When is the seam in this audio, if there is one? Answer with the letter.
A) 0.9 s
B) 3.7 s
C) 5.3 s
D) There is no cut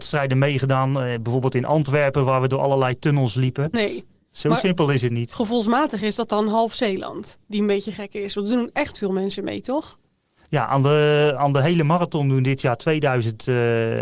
B